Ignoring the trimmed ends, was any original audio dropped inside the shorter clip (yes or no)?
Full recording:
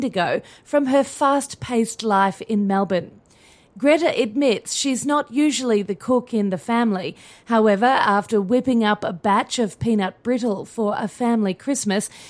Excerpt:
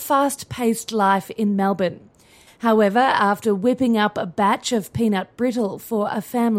yes